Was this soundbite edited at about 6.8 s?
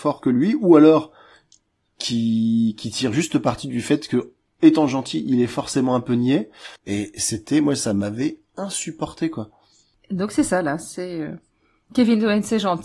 yes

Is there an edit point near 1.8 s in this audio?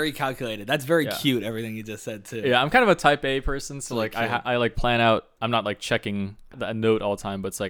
no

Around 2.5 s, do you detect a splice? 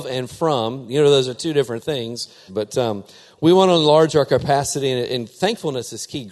yes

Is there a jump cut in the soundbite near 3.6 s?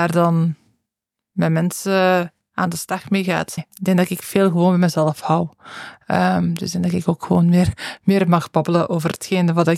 yes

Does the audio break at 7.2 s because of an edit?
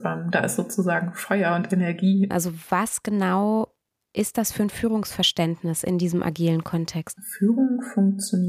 yes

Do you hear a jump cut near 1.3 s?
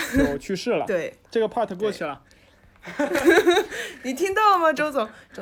yes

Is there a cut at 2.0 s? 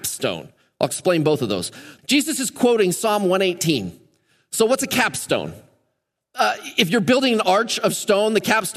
yes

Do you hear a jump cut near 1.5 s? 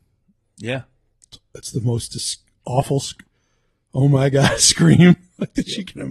no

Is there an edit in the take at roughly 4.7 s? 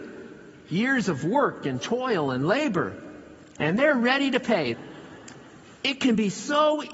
yes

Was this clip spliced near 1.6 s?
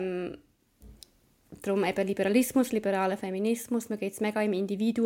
no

